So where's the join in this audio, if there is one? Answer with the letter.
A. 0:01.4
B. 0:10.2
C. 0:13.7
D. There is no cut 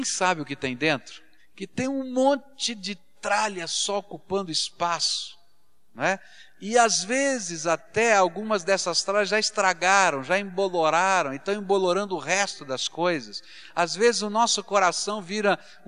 D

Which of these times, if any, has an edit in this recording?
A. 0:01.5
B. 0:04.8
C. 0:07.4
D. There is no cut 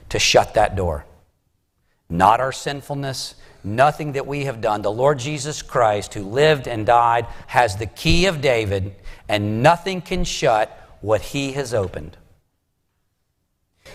C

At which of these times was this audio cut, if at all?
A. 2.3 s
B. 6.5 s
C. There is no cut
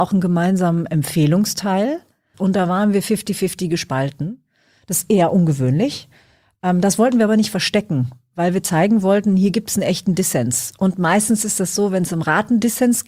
A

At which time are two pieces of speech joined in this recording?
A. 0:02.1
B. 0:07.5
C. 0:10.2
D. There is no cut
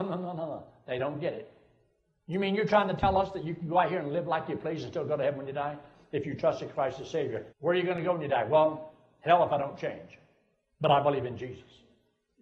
B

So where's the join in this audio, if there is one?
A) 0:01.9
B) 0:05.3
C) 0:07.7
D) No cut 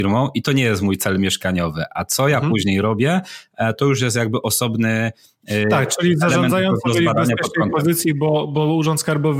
D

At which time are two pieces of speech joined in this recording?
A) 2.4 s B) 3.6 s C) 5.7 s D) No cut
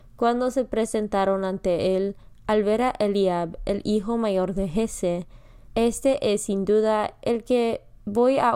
C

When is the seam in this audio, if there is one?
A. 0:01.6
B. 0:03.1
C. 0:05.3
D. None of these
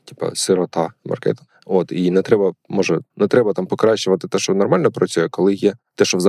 B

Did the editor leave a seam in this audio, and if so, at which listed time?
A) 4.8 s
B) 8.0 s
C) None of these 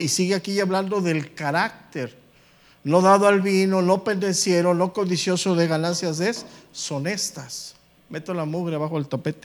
B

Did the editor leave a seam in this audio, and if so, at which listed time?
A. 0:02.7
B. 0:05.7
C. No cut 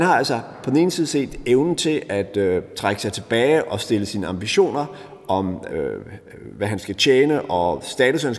B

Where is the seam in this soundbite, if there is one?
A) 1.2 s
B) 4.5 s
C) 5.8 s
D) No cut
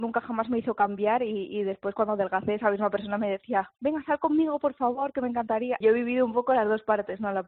C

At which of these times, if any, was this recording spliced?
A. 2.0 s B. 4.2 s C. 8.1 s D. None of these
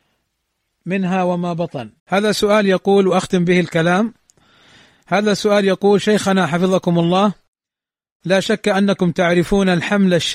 A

